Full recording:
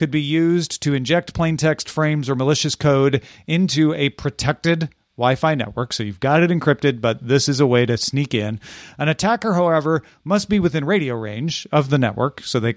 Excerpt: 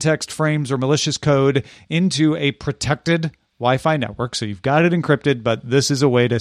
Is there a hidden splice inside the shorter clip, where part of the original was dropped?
no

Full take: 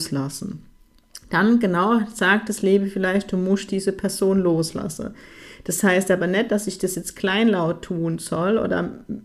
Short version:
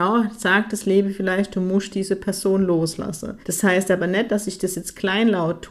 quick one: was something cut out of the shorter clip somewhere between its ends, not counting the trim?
yes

